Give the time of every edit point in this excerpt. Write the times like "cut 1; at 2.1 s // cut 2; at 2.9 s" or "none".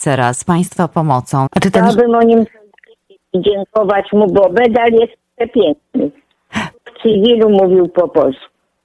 cut 1; at 1.5 s // cut 2; at 6.7 s